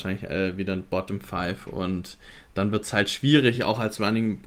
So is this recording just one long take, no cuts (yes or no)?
yes